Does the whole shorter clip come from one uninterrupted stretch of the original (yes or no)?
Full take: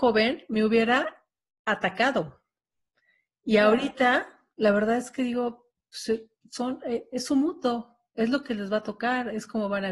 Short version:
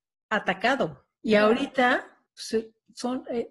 no